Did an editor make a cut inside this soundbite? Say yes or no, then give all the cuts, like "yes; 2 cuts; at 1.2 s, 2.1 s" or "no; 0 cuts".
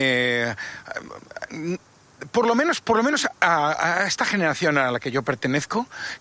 no; 0 cuts